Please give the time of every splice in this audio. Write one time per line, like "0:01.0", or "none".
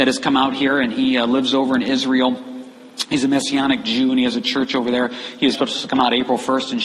0:05.5